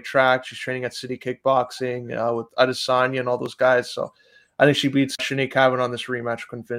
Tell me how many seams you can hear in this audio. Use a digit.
1